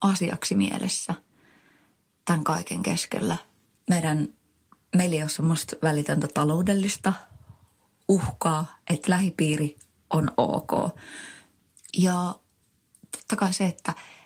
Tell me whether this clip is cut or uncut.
cut